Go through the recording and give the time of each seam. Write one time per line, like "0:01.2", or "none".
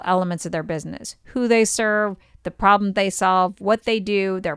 none